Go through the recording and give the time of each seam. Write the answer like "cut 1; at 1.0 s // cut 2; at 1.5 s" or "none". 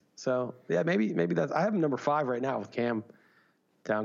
none